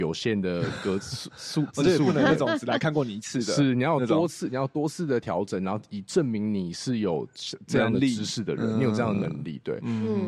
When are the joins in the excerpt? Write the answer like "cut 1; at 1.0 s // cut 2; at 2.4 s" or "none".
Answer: none